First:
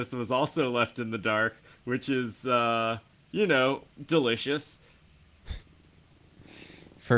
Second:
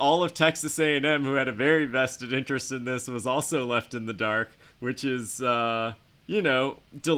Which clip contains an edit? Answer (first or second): first